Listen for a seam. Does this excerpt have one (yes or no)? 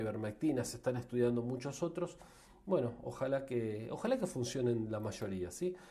no